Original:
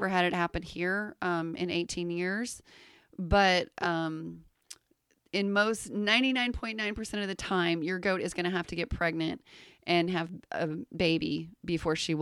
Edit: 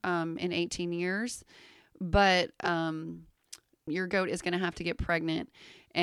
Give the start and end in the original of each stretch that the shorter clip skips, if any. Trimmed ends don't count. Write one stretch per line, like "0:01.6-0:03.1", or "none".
0:05.1-0:07.8

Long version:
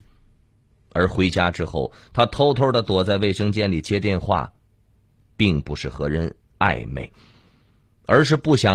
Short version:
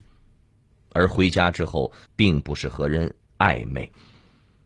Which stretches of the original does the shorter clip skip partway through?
0:02.1-0:05.3

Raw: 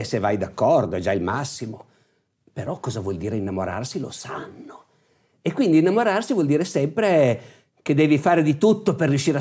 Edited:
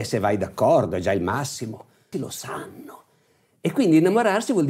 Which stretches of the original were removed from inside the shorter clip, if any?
0:02.1-0:03.9

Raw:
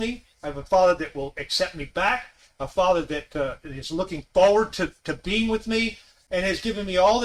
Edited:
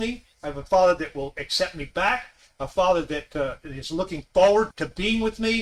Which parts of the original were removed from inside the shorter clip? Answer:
0:04.7-0:05.0

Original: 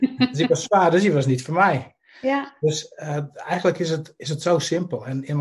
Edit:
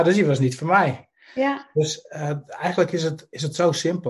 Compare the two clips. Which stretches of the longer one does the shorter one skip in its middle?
none

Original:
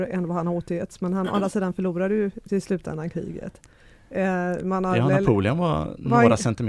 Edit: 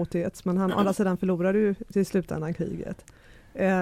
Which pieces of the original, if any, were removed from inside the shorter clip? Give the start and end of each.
none

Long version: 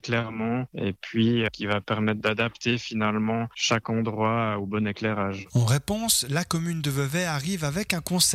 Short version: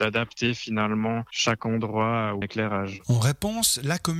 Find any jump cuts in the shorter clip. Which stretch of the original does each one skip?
0:04.7-0:04.9

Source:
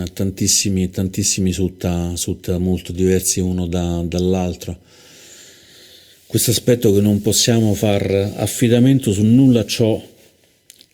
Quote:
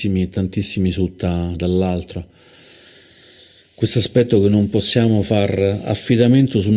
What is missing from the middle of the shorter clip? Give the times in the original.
0:02.2-0:04.1

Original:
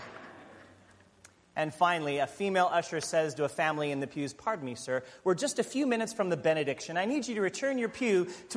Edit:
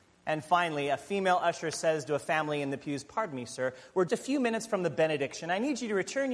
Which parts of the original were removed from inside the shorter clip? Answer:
0:05.4-0:05.5

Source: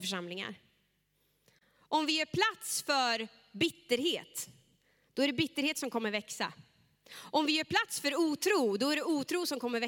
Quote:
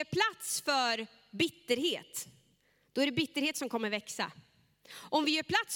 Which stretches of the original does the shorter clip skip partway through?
none

